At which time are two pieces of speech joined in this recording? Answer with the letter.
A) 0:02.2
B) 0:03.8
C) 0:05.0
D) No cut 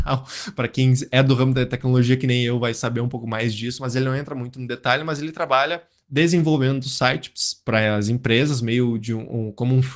D